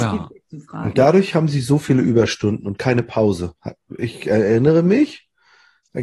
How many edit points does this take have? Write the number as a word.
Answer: zero